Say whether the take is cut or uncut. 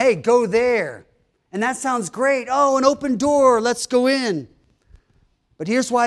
uncut